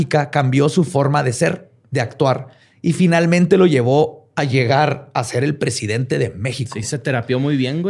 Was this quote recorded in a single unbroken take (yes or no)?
yes